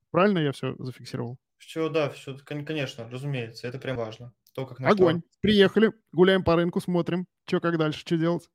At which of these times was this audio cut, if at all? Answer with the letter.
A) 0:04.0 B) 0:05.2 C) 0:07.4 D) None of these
A